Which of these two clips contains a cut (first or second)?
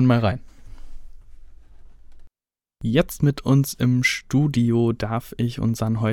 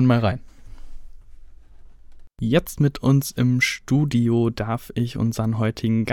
second